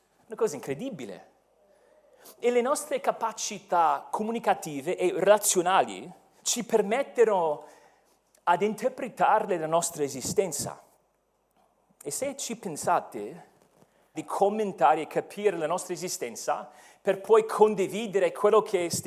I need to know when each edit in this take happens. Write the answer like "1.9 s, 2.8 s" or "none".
6.4 s, 14.1 s